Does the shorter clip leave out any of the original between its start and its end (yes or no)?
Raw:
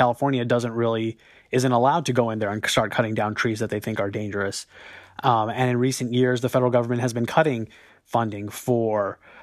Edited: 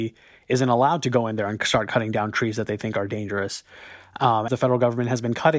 yes